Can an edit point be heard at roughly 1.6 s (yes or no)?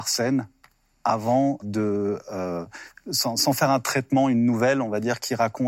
yes